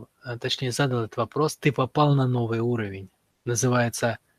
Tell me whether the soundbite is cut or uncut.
uncut